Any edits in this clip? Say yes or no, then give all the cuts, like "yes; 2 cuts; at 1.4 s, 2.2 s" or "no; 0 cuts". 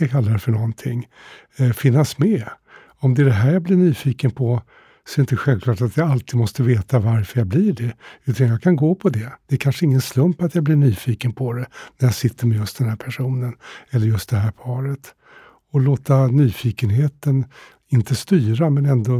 no; 0 cuts